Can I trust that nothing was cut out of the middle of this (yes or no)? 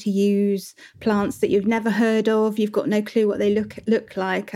yes